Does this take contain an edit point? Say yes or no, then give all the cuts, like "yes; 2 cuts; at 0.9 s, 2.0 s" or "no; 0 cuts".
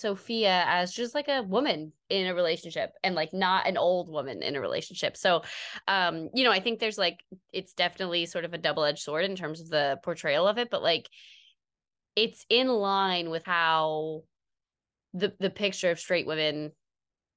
yes; 1 cut; at 13.4 s